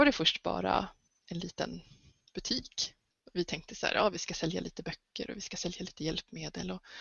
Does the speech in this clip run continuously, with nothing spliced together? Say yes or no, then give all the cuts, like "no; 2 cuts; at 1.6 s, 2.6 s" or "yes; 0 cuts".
yes; 0 cuts